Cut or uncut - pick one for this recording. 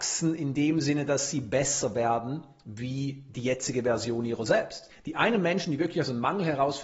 cut